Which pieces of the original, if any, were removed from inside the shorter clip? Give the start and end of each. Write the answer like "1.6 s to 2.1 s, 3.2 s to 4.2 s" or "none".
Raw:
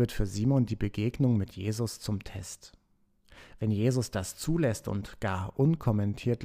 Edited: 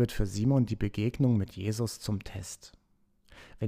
none